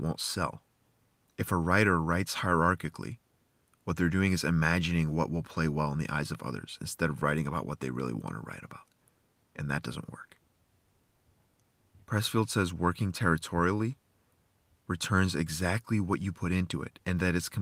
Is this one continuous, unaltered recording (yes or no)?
yes